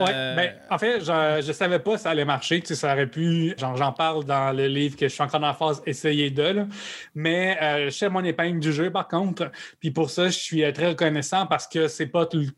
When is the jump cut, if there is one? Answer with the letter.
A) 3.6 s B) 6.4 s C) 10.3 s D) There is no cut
A